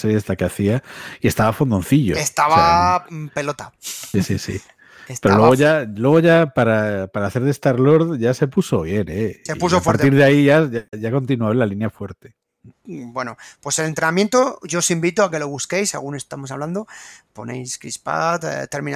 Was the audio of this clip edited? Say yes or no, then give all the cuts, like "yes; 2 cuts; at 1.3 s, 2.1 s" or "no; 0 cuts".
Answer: yes; 1 cut; at 12.7 s